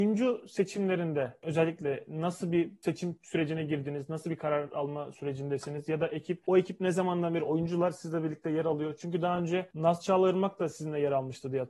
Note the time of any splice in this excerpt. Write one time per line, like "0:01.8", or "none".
none